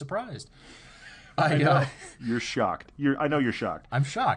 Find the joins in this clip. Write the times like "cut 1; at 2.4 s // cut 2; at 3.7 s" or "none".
none